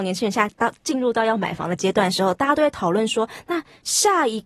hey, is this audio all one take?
yes; 0 cuts

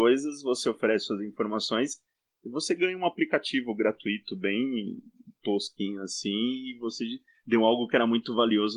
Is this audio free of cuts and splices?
yes; 0 cuts

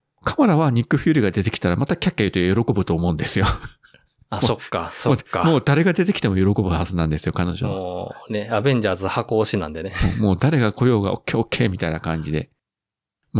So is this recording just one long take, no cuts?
yes; 0 cuts

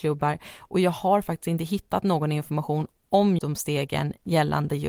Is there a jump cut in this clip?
yes; 1 cut; at 3.4 s

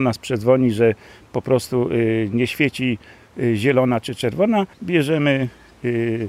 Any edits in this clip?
yes; 1 cut; at 4.7 s

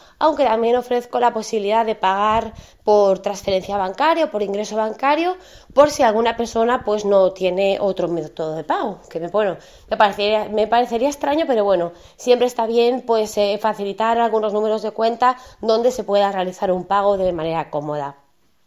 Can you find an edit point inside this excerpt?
no; 0 cuts

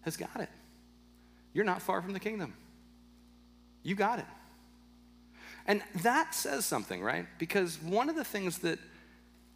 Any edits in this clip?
no; 0 cuts

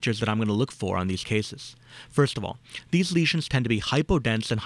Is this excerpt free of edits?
yes; 0 cuts

